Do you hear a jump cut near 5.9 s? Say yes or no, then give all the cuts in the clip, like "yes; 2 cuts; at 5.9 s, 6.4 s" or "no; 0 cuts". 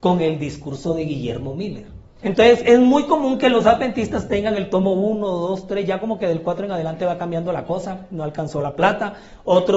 no; 1 cut; at 2.2 s